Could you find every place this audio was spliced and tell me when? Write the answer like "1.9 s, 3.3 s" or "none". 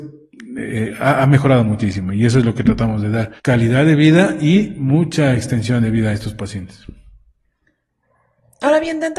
3.4 s